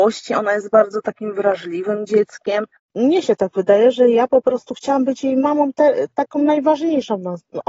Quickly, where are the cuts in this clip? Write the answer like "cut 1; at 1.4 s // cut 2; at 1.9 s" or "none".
cut 1; at 2.8 s